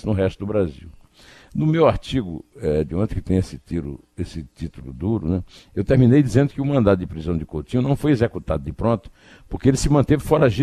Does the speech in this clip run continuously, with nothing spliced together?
yes; 0 cuts

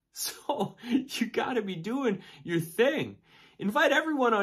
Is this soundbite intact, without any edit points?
yes; 0 cuts

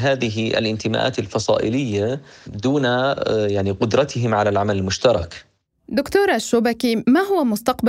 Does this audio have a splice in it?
no; 0 cuts

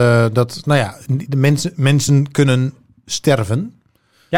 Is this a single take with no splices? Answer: yes; 0 cuts

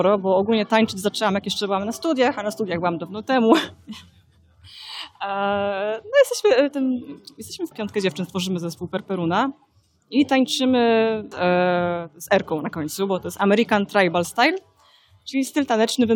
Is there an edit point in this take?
yes; 2 cuts; at 7.7 s, 11.3 s

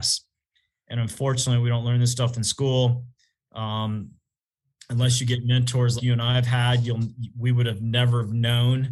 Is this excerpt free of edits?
no; 1 cut; at 6.0 s

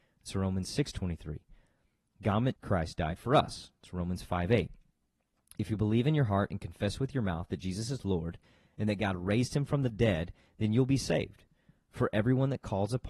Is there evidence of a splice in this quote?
yes; 1 cut; at 2.6 s

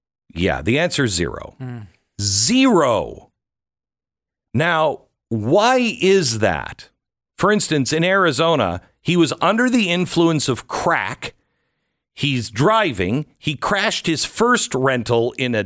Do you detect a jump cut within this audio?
no; 0 cuts

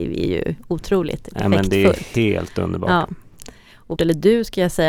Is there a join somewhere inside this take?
yes; 1 cut; at 4.0 s

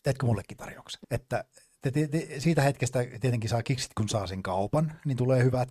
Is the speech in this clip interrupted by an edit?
yes; 1 cut; at 1.0 s

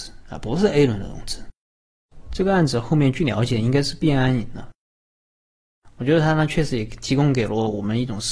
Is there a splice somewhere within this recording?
no; 0 cuts

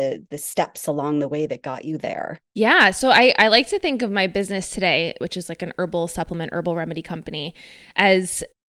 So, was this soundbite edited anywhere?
yes; 1 cut; at 5.2 s

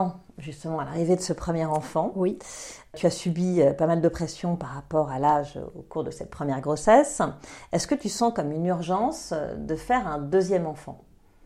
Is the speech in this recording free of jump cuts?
yes; 0 cuts

